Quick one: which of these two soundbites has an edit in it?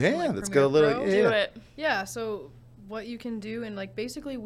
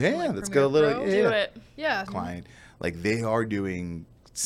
second; 1 cut; at 2.1 s

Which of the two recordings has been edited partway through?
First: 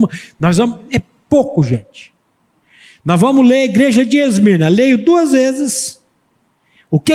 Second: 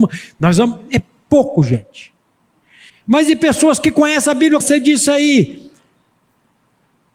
second; 2 cuts; at 2.9 s, 4.6 s

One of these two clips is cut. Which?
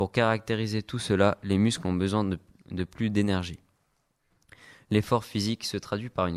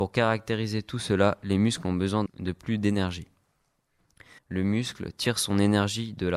second; 2 cuts; at 2.3 s, 4.4 s

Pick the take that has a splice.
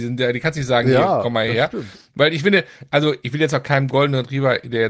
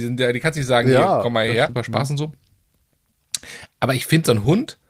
second; 1 cut; at 1.7 s

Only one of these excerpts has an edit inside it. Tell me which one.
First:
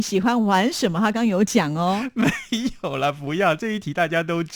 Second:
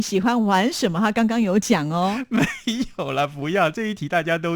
first; 1 cut; at 1.1 s

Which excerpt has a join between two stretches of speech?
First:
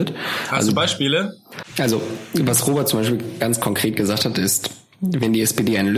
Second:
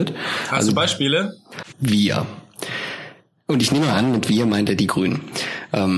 second; 1 cut; at 1.7 s

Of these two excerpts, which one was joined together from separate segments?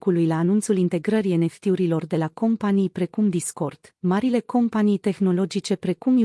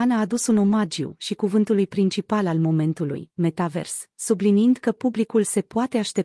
first; 1 cut; at 4.0 s

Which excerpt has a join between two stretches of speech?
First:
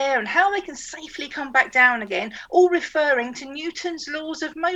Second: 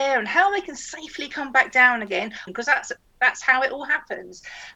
second; 1 cut; at 2.5 s

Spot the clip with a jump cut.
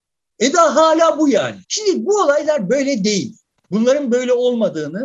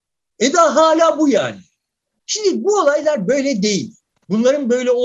first; 1 cut; at 1.6 s

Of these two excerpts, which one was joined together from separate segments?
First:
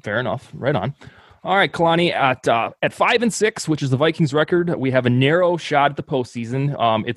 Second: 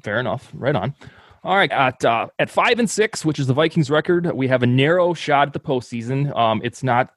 second; 1 cut; at 1.7 s

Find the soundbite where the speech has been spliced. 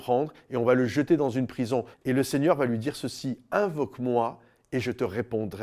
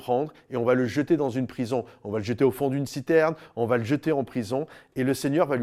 first; 1 cut; at 1.9 s

